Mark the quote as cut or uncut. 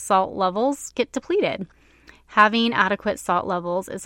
uncut